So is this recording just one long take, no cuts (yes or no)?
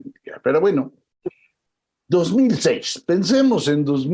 yes